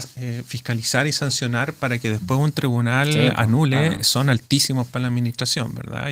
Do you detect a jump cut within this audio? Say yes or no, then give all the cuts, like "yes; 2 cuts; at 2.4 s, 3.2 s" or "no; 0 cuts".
no; 0 cuts